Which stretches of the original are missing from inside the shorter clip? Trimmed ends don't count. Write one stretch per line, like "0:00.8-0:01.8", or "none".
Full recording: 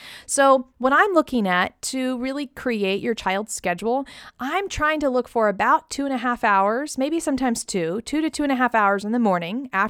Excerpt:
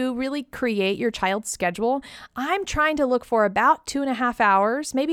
none